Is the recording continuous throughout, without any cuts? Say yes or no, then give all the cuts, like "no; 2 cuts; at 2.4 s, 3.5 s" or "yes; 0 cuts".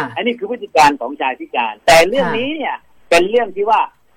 no; 1 cut; at 1.8 s